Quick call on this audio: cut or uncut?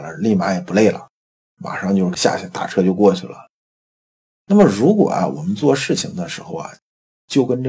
uncut